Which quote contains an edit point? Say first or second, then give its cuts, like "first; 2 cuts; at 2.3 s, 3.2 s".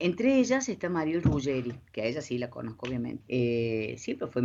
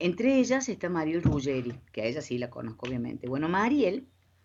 first; 1 cut; at 3.2 s